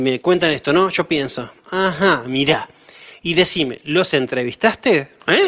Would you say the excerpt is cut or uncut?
uncut